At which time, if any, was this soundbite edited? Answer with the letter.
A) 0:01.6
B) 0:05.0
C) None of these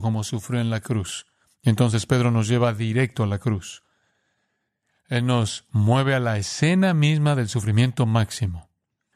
C